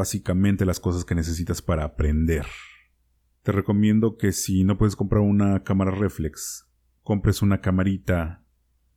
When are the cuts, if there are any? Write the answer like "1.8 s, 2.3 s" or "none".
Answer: none